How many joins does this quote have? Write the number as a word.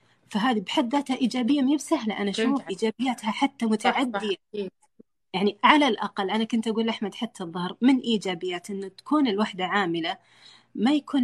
one